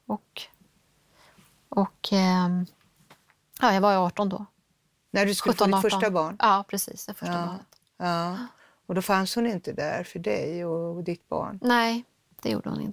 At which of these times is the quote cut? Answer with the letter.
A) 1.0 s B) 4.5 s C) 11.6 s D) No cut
D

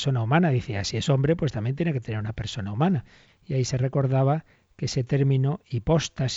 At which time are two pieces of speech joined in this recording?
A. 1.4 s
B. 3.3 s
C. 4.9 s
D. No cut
B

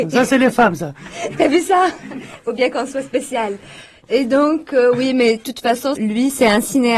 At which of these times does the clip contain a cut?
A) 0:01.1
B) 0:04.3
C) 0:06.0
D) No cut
C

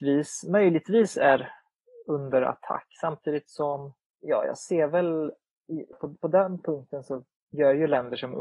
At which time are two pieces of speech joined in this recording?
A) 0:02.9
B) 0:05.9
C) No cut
B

